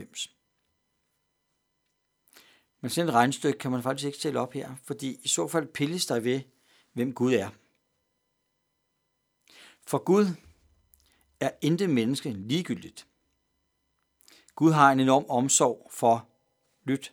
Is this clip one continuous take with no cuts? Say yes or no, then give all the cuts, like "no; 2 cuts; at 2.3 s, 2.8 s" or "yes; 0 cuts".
yes; 0 cuts